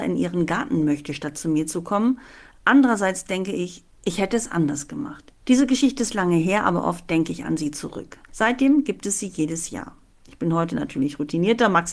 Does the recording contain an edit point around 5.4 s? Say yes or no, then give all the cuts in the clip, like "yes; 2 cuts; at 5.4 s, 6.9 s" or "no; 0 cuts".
yes; 2 cuts; at 5.4 s, 8.3 s